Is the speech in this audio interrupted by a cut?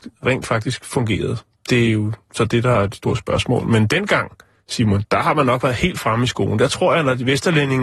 no; 0 cuts

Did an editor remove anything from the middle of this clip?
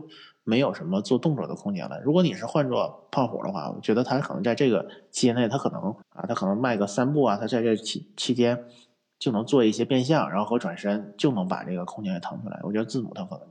yes; 1 cut; at 6.0 s

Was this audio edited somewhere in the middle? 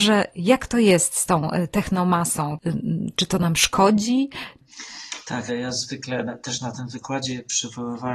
yes; 1 cut; at 5.5 s

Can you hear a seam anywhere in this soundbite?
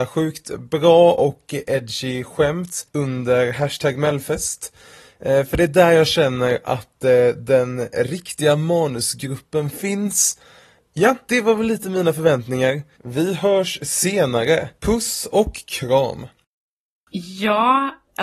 no; 0 cuts

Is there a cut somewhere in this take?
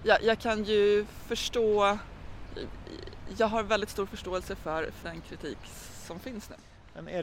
yes; 1 cut; at 5.0 s

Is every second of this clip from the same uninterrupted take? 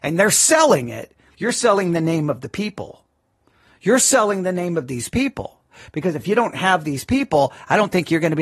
no; 1 cut; at 1.3 s

